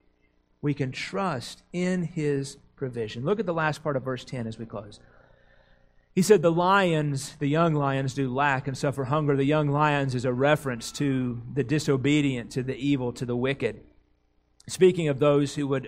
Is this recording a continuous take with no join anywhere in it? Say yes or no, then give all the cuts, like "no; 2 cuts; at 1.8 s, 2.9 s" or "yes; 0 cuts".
yes; 0 cuts